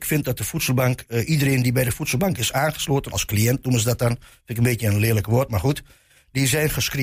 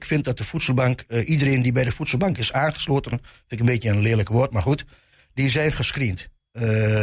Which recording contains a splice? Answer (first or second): second